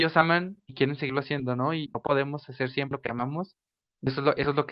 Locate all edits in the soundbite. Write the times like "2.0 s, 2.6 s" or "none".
1.9 s